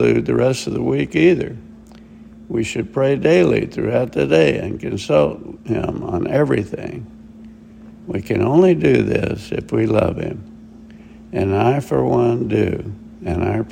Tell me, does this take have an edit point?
no; 0 cuts

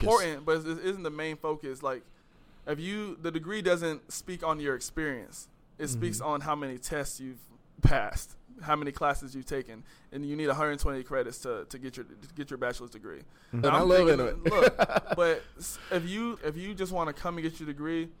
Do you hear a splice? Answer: yes; 2 cuts; at 13.6 s, 16.4 s

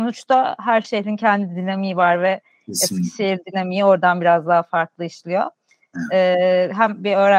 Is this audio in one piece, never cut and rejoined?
yes; 0 cuts

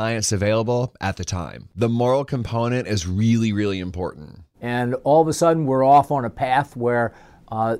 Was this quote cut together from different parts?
yes; 2 cuts; at 1.7 s, 4.5 s

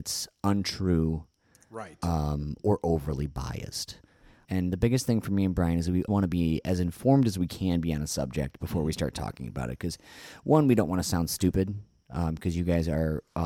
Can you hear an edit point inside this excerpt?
yes; 2 cuts; at 4.4 s, 6.1 s

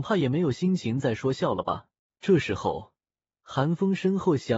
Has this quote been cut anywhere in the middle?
yes; 1 cut; at 2.1 s

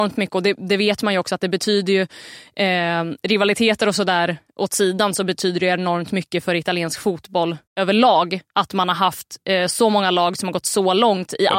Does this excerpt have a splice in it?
yes; 1 cut; at 7.7 s

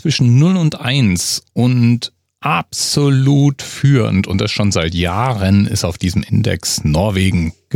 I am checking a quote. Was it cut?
no; 0 cuts

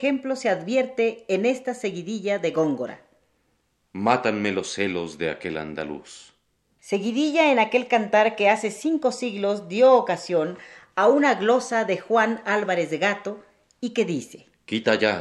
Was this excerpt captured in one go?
no; 1 cut; at 6.8 s

